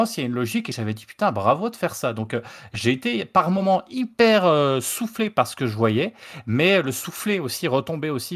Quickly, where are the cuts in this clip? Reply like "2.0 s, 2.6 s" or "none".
none